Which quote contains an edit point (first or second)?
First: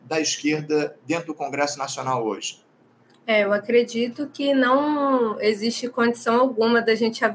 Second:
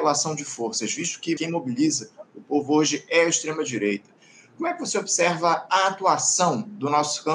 second